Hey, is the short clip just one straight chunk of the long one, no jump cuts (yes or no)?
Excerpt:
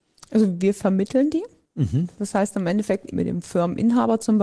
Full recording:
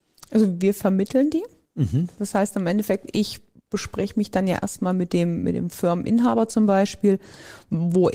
no